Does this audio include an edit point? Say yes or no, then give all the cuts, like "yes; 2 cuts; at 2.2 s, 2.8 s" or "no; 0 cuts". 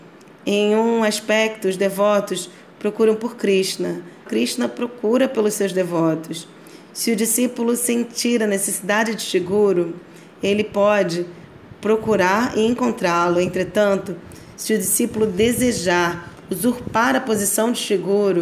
yes; 1 cut; at 4.3 s